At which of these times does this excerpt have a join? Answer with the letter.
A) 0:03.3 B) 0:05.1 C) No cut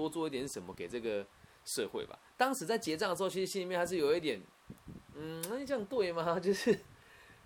C